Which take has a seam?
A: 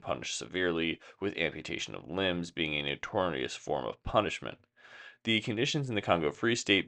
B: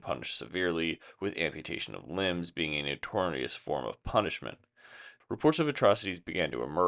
B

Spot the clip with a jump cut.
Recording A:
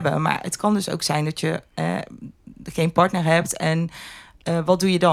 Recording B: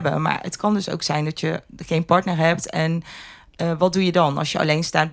B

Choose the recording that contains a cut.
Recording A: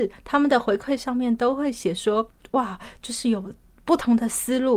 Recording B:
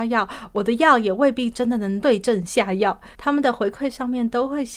B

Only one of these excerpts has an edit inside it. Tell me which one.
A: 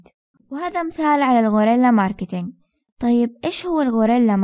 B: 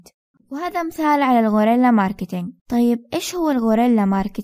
B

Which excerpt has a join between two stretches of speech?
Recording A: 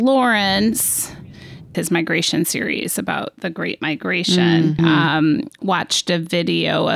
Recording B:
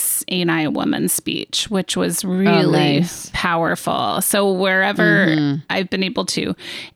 A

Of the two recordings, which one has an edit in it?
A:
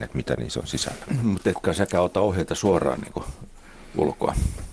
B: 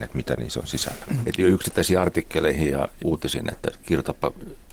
B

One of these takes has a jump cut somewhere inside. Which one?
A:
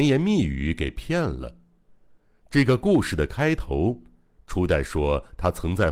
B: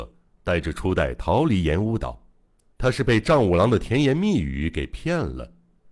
B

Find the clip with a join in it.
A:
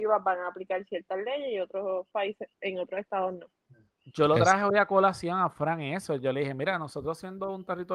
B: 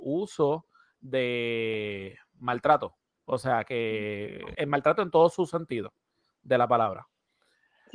B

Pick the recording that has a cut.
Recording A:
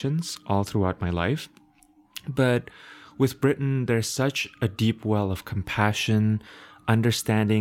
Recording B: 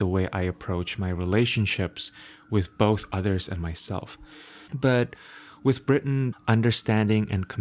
B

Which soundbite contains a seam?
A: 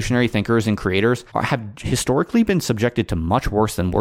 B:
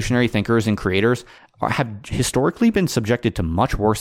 A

